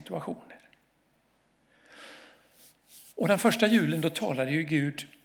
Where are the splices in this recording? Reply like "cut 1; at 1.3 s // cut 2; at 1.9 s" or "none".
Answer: none